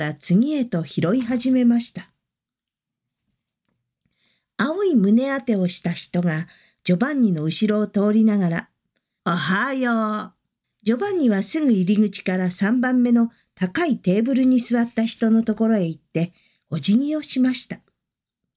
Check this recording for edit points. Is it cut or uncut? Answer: cut